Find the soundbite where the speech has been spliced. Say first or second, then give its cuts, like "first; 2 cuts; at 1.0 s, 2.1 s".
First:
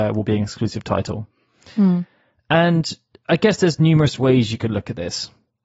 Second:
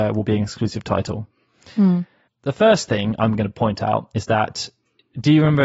second; 1 cut; at 2.3 s